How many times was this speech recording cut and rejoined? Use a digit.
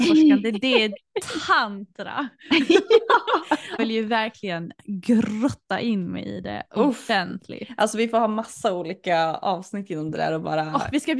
1